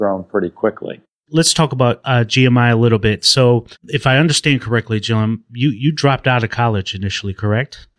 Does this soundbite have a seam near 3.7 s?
yes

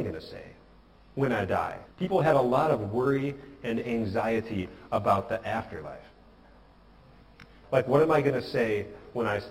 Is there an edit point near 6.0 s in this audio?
no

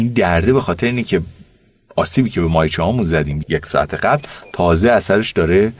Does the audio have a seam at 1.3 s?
no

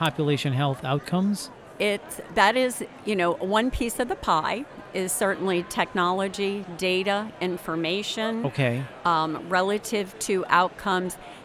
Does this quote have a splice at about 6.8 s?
no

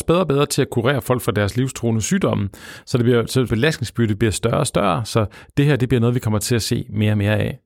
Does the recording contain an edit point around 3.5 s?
yes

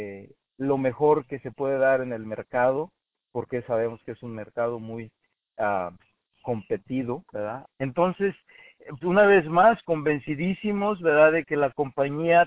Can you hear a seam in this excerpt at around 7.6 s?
yes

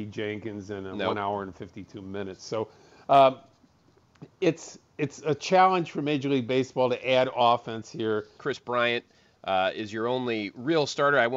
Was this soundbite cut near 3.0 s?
no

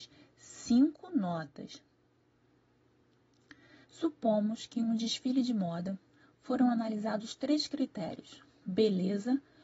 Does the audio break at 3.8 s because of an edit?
yes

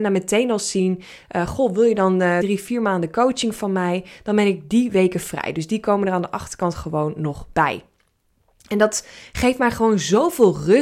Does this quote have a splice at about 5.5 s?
no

